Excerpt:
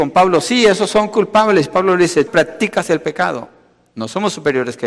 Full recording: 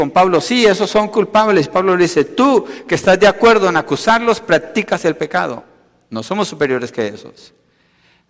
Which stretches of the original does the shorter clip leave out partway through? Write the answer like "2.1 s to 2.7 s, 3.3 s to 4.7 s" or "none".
2.3 s to 4.4 s